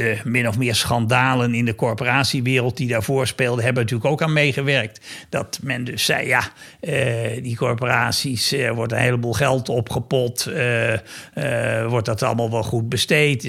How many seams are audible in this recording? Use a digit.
0